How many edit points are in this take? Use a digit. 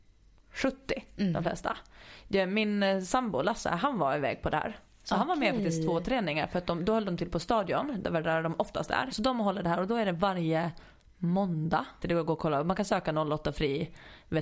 2